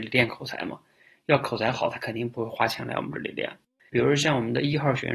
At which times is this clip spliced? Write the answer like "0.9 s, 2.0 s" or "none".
3.9 s